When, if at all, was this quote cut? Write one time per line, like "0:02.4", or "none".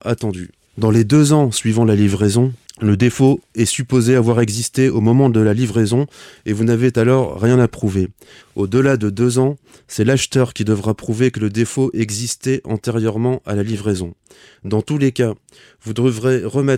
0:08.4